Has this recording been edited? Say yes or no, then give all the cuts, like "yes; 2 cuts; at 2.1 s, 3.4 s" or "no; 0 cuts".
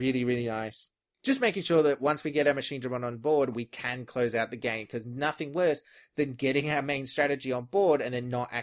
no; 0 cuts